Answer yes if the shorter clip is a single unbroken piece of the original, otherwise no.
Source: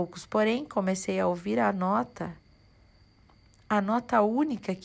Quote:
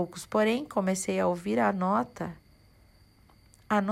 yes